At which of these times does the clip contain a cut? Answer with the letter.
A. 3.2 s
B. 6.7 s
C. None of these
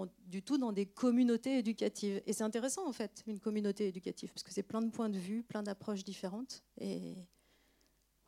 C